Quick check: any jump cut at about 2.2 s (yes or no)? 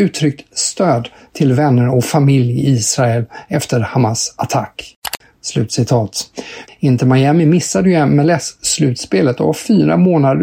no